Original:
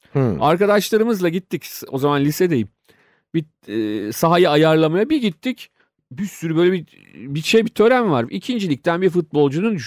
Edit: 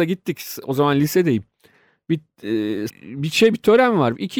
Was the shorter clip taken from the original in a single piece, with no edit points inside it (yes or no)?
no